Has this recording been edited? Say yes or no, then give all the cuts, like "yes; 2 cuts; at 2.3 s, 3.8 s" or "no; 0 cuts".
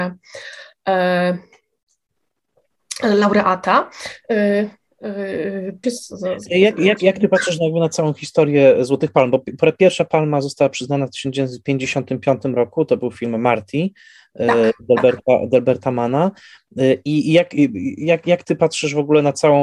yes; 1 cut; at 5.8 s